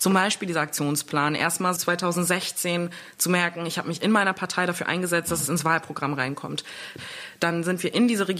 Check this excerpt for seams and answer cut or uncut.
cut